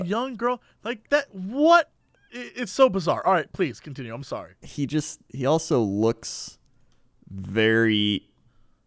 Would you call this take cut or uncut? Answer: uncut